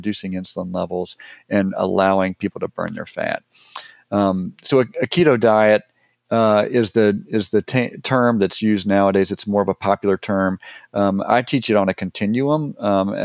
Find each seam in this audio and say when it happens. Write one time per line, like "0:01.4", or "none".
none